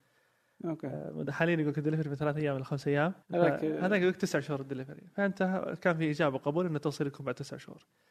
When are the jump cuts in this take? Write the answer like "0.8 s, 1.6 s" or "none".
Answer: 3.2 s